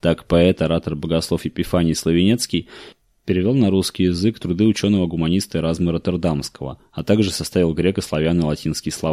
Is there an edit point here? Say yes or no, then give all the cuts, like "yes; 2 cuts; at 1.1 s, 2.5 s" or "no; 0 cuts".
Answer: no; 0 cuts